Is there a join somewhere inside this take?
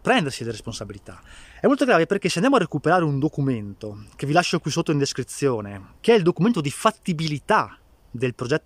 yes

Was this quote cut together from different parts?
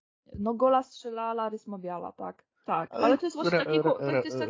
yes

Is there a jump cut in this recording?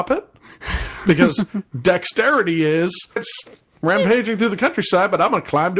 yes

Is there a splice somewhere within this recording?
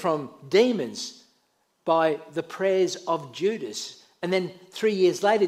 no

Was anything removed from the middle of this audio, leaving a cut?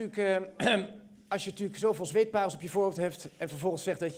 no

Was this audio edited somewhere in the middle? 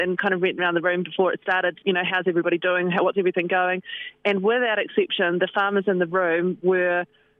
no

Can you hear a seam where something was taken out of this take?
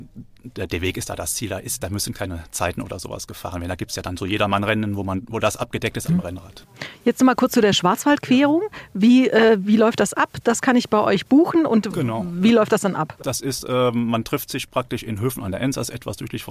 yes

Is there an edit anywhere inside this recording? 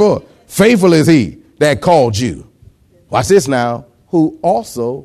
no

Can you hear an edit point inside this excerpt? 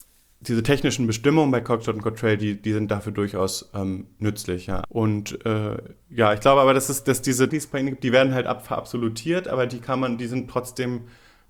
yes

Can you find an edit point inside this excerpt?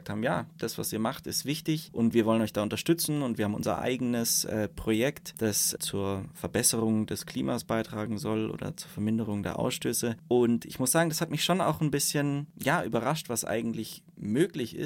no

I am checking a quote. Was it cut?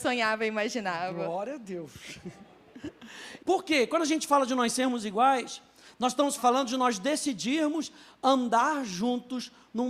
yes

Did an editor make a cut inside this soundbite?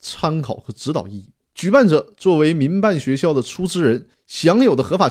yes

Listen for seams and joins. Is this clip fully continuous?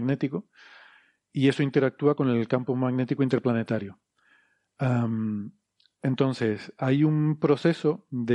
yes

